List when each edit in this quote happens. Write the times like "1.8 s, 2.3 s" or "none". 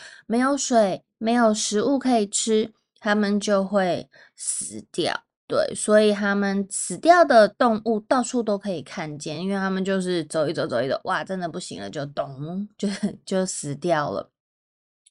none